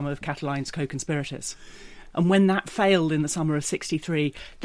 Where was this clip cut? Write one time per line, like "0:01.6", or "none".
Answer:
0:02.1